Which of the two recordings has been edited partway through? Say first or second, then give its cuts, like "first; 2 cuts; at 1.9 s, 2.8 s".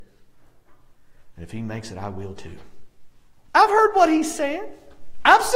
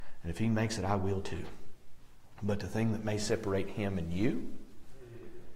first; 2 cuts; at 1.4 s, 3.5 s